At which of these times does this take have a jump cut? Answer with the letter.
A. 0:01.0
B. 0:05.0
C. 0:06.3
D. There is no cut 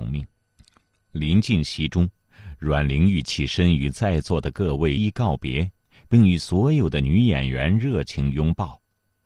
B